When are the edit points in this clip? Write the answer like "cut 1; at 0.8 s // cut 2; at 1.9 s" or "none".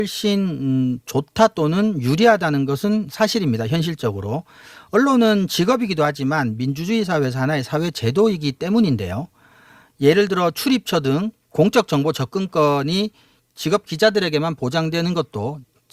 none